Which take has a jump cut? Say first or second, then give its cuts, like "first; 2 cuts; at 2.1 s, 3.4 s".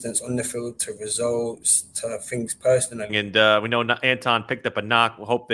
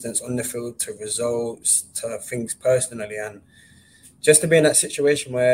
first; 1 cut; at 3.1 s